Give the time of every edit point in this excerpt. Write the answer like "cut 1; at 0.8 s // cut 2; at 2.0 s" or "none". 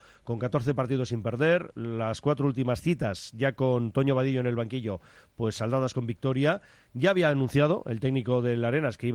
none